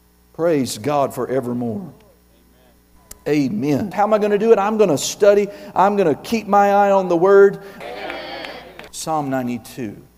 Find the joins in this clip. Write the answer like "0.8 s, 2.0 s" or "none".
3.9 s, 7.8 s, 8.9 s